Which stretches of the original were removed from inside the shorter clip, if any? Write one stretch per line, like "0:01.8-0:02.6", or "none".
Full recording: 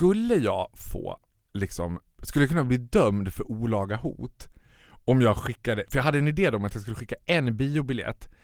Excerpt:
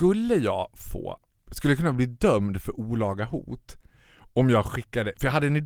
0:01.4-0:02.1